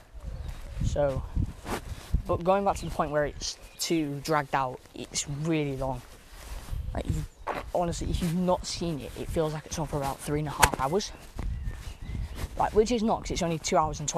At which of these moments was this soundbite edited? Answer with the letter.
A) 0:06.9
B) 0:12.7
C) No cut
C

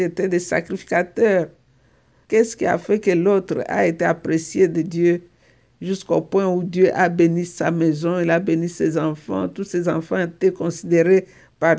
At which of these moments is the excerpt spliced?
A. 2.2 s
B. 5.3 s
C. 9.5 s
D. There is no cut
A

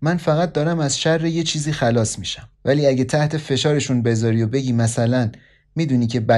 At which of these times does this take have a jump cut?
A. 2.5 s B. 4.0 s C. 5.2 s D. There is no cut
A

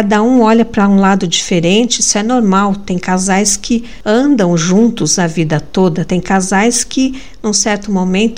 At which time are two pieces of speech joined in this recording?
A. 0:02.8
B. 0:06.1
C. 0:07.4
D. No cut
D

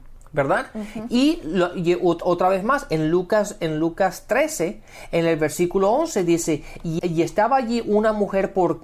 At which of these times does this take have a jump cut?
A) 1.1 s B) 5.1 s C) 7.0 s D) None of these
C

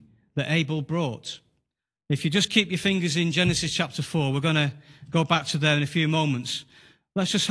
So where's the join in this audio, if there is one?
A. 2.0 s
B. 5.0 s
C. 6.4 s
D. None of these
D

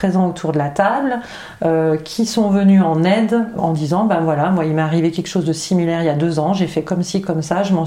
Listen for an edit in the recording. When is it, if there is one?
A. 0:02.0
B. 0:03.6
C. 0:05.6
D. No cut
B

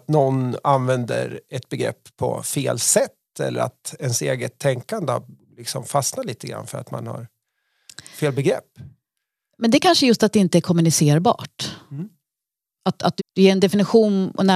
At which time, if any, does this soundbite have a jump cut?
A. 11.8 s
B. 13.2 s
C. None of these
B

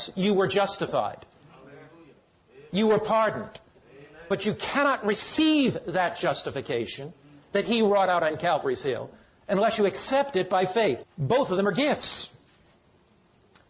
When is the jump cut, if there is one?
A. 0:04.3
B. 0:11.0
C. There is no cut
B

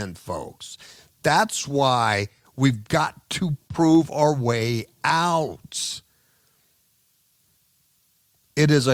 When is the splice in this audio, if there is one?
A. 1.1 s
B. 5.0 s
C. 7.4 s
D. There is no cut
D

